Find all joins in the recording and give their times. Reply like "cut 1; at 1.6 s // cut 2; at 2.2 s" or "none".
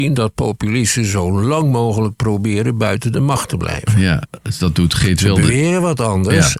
none